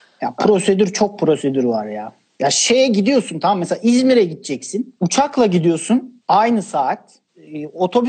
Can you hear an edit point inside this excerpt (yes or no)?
no